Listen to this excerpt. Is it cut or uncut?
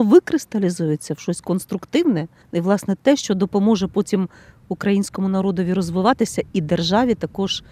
uncut